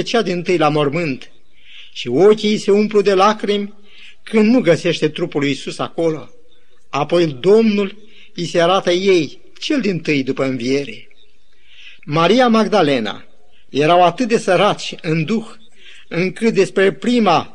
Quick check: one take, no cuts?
no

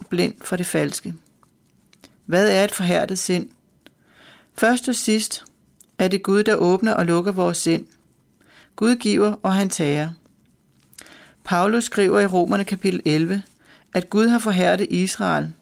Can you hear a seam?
yes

